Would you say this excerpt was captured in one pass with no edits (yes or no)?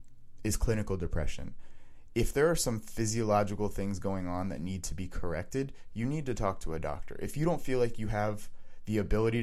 yes